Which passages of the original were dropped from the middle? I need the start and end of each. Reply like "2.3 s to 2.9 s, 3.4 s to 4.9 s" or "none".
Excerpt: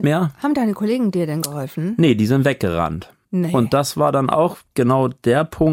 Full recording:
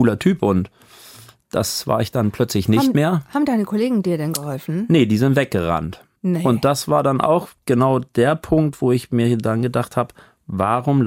none